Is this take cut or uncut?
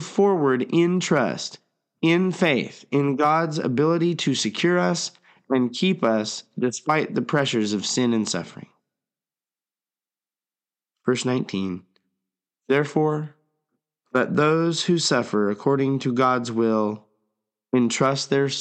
uncut